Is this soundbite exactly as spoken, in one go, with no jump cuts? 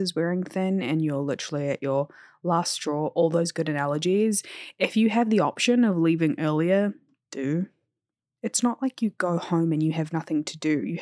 yes; 0 cuts

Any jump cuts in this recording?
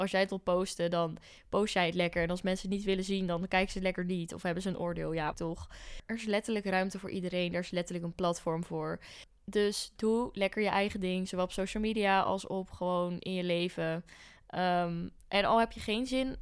yes; 1 cut; at 5.3 s

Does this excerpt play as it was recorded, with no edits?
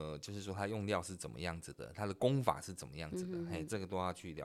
yes; 0 cuts

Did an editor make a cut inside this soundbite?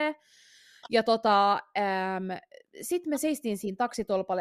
no; 0 cuts

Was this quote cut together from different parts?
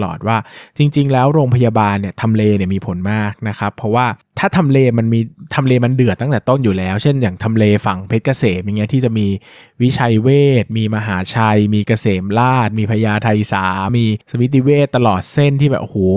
yes; 1 cut; at 13.9 s

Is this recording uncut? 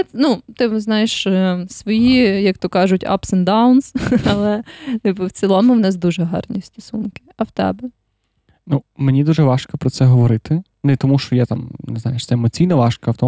yes; 0 cuts

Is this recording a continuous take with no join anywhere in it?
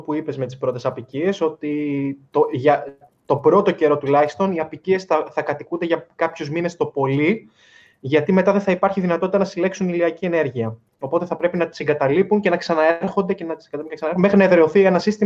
yes; 0 cuts

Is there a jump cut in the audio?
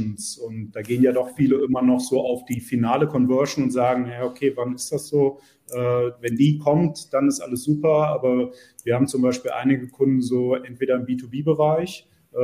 no; 0 cuts

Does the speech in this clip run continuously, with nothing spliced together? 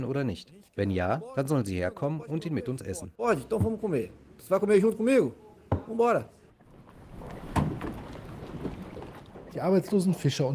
yes; 0 cuts

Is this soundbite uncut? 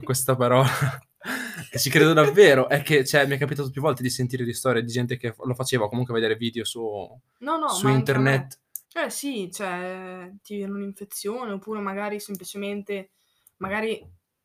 no; 1 cut; at 8.8 s

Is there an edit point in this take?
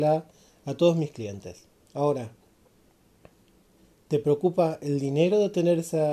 yes; 1 cut; at 1.8 s

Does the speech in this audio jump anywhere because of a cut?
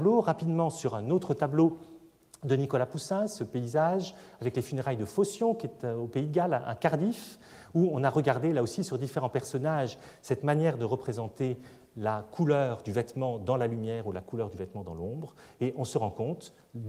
no; 0 cuts

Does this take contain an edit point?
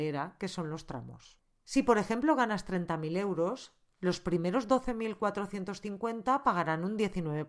no; 0 cuts

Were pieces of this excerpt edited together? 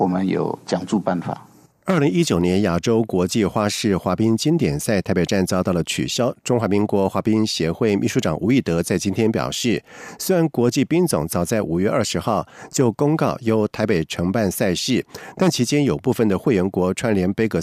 yes; 1 cut; at 1.7 s

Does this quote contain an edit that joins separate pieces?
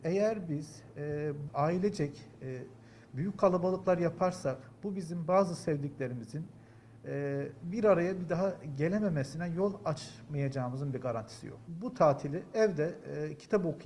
yes; 1 cut; at 1.5 s

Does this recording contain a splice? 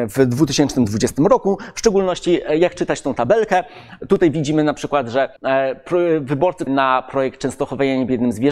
yes; 2 cuts; at 5.4 s, 6.7 s

